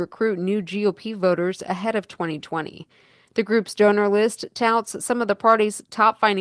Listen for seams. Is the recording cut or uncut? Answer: uncut